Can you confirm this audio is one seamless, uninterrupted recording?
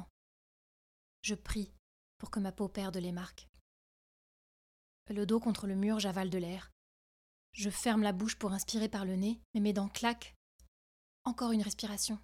no; 1 cut; at 9.5 s

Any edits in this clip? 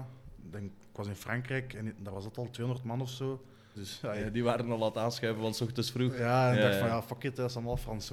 yes; 1 cut; at 3.7 s

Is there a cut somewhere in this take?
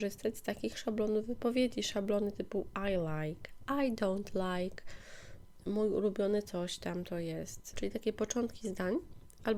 yes; 1 cut; at 7.7 s

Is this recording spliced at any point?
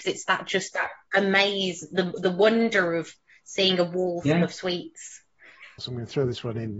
yes; 1 cut; at 5.8 s

